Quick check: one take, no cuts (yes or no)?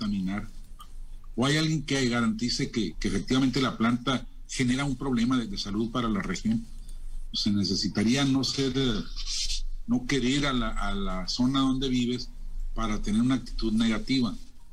no